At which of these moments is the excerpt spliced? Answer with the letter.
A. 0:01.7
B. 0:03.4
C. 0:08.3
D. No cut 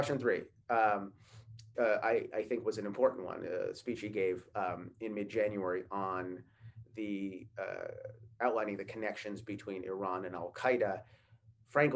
A